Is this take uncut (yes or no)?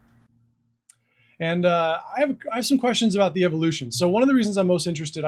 yes